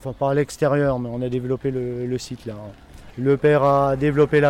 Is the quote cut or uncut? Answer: cut